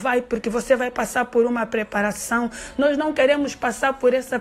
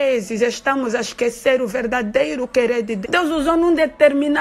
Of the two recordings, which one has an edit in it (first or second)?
second